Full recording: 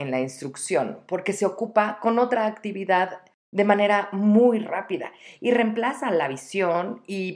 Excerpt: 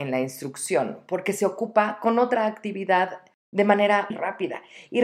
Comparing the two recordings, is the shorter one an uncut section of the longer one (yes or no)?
no